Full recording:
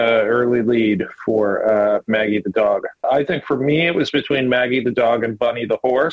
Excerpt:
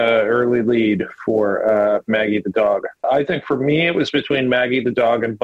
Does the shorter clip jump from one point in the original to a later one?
no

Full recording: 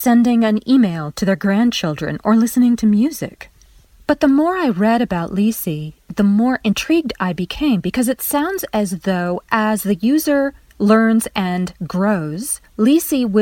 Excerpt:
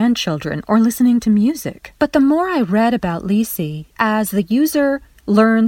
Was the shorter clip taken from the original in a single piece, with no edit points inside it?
no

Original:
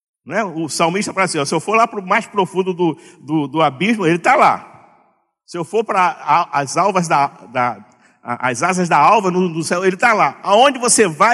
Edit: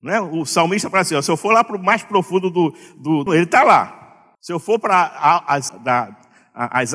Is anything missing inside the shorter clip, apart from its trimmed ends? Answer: yes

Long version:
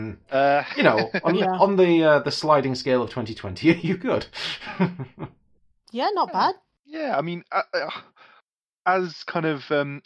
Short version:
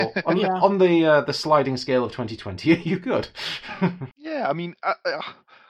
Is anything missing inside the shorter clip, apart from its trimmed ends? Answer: yes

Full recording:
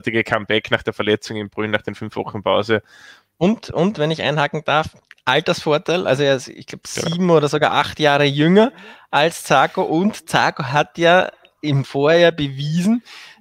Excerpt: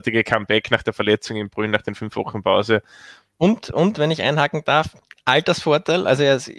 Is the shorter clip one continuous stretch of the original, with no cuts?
yes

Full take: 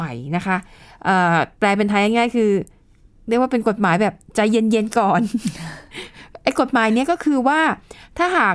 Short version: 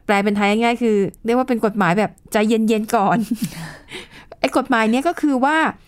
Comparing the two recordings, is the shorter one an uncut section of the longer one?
no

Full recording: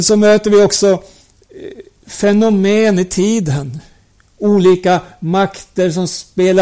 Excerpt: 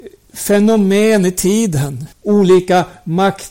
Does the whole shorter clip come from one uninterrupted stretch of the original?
no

